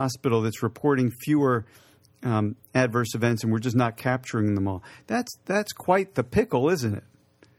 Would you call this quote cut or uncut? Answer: uncut